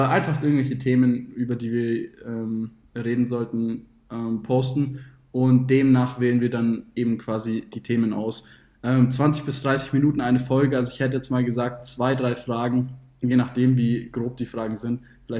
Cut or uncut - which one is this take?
uncut